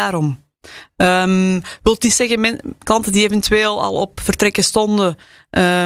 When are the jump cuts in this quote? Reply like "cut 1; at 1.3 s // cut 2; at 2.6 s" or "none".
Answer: none